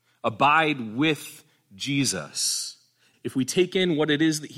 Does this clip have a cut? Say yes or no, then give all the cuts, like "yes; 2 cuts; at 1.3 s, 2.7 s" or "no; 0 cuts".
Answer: yes; 1 cut; at 3.1 s